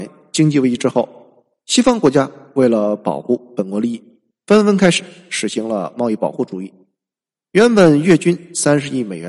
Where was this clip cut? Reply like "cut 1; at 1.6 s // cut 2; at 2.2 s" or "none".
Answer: none